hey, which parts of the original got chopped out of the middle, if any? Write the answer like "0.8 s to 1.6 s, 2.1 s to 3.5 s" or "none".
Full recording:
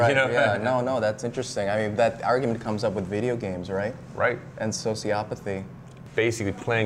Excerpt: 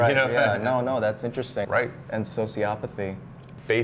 1.6 s to 4.1 s